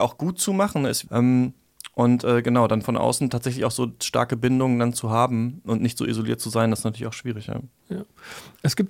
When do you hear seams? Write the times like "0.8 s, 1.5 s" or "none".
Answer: 1.1 s

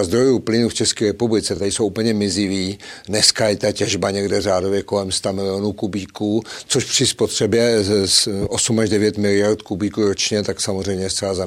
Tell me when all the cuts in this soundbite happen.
none

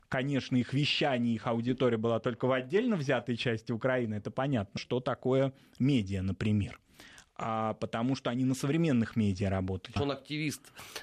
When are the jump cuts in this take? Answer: 4.8 s, 10.0 s

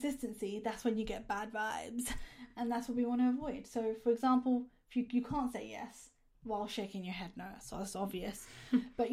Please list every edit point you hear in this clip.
none

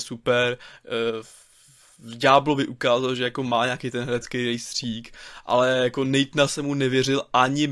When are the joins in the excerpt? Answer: none

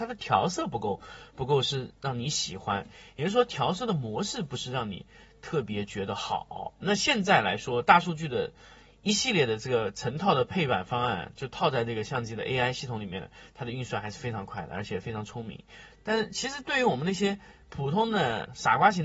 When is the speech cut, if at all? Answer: 6.8 s, 15.9 s

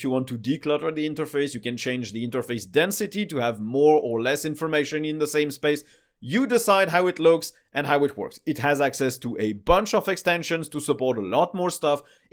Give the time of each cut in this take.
none

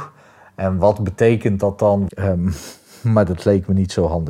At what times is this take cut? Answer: 2.1 s

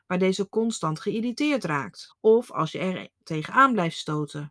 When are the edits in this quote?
2.1 s

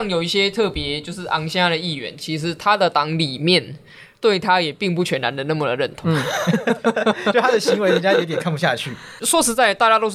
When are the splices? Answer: none

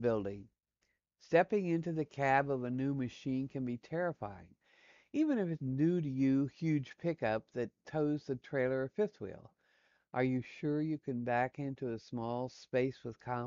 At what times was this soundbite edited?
5.6 s

